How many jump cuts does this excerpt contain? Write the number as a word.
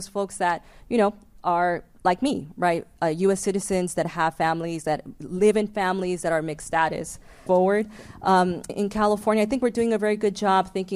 two